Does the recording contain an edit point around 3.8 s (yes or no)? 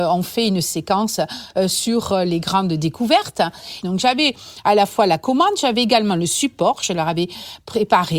yes